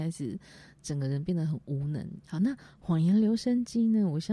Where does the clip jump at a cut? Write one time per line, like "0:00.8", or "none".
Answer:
0:02.2